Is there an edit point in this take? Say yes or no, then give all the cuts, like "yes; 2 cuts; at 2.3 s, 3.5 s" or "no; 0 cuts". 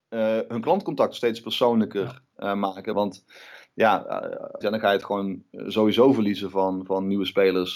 yes; 2 cuts; at 2.9 s, 4.6 s